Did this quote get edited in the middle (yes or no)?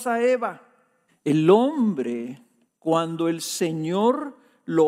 yes